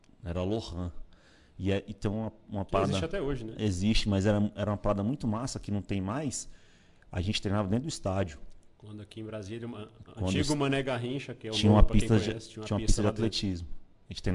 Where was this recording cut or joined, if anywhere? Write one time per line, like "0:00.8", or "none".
none